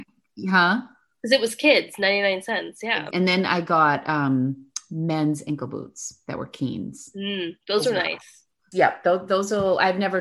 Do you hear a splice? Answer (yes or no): yes